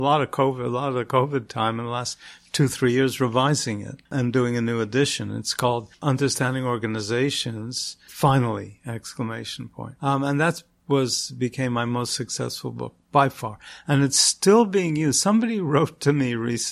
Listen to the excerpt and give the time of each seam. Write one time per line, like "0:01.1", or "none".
0:10.0